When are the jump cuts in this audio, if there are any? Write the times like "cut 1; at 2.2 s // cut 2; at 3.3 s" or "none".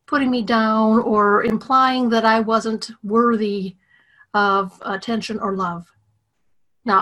none